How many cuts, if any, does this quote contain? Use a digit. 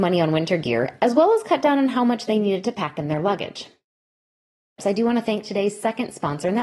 1